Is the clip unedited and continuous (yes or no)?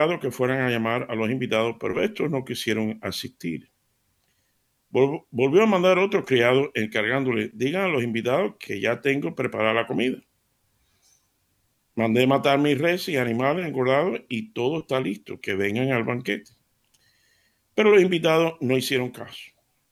yes